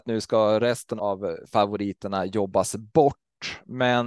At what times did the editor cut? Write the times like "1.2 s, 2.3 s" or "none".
1.0 s